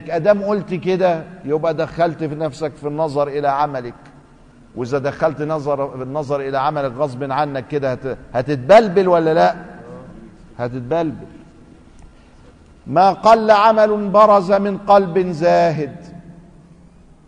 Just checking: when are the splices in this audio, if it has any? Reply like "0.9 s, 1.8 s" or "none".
none